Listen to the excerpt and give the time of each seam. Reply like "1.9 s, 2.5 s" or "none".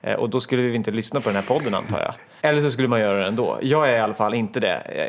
2.4 s